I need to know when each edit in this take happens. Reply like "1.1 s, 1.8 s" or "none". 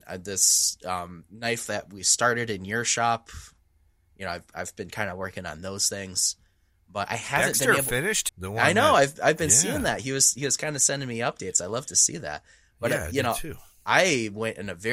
8.3 s